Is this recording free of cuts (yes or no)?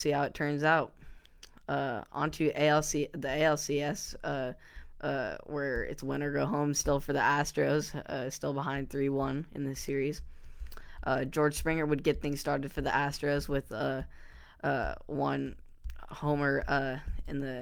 yes